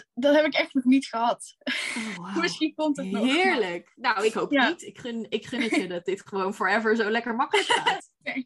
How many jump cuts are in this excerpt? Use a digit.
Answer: 0